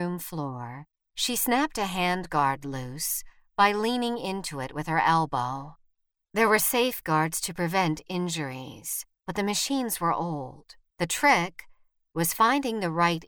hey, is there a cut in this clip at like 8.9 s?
no; 2 cuts; at 6.2 s, 10.9 s

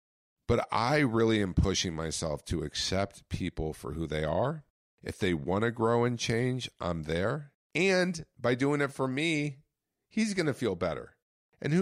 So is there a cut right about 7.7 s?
yes; 1 cut; at 7.7 s

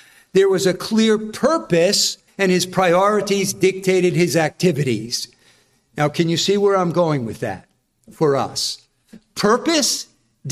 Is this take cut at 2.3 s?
yes; 1 cut; at 2.3 s

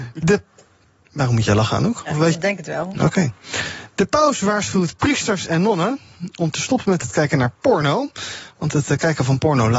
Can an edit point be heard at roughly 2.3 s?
yes; 1 cut; at 2.3 s

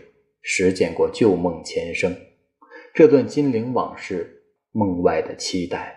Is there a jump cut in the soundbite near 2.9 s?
no; 1 cut; at 4.6 s

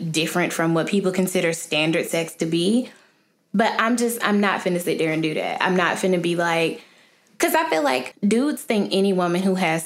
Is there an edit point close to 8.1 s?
yes; 1 cut; at 8.1 s

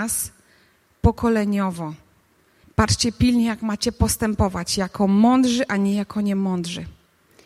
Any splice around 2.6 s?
yes; 1 cut; at 2.6 s

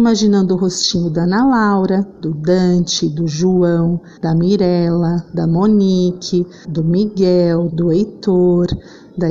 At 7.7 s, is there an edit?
yes; 3 cuts; at 4.2 s, 6.6 s, 7.7 s

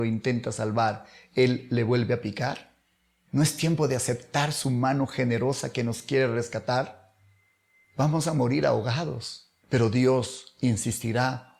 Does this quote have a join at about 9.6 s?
yes; 2 cuts; at 3.2 s, 9.6 s

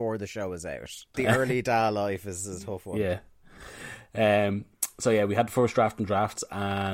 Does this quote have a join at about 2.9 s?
no; 1 cut; at 1.1 s

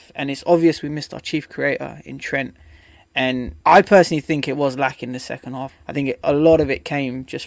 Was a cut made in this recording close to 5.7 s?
yes; 2 cuts; at 3.6 s, 5.7 s

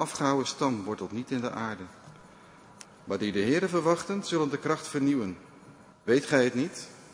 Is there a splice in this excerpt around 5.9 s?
yes; 2 cuts; at 2.9 s, 5.9 s

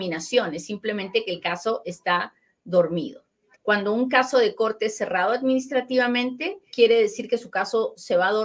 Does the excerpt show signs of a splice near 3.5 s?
yes; 2 cuts; at 3.5 s, 6.7 s

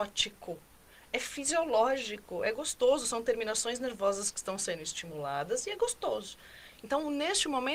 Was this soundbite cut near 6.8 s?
no; 0 cuts

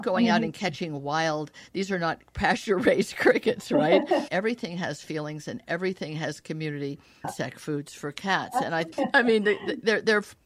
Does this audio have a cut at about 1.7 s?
no; 3 cuts; at 4.3 s, 7.2 s, 8.9 s

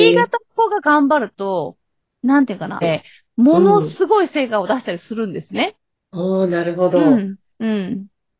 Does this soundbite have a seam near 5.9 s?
yes; 2 cuts; at 2.8 s, 5.9 s

